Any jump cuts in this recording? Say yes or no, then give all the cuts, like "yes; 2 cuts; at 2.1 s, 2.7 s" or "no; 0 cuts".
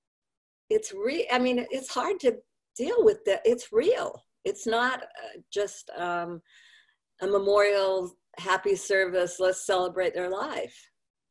yes; 1 cut; at 5.0 s